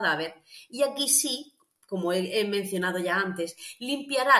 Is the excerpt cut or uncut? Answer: uncut